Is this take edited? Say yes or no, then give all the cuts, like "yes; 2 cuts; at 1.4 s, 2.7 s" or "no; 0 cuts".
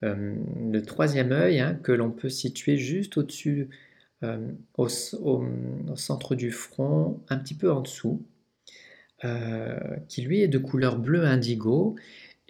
no; 0 cuts